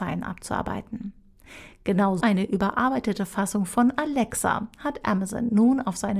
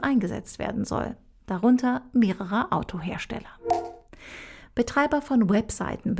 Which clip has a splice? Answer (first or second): first